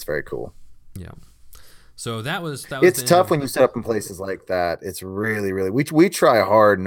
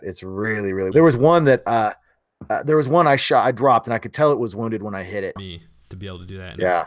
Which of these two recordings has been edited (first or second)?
second